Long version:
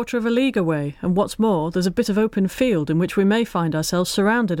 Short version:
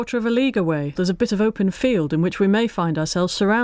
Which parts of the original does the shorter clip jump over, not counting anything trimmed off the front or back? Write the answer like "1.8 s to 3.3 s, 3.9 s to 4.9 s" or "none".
1.0 s to 1.7 s